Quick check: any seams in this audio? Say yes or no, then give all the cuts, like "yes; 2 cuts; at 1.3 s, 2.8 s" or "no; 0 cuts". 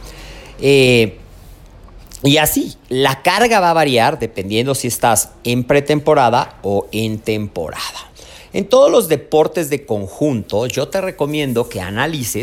no; 0 cuts